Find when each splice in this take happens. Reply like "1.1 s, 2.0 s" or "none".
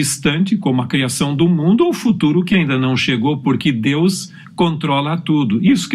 none